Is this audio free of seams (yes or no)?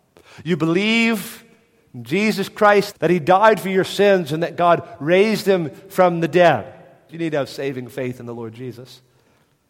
no